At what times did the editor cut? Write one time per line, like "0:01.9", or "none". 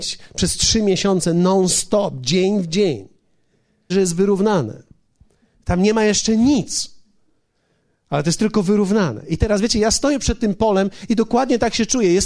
0:03.9